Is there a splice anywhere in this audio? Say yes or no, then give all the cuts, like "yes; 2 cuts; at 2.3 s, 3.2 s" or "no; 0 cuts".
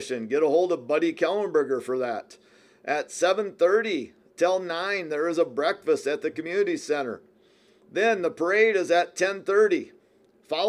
no; 0 cuts